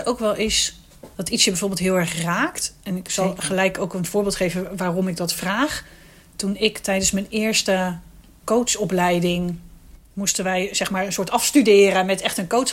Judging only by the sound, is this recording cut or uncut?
uncut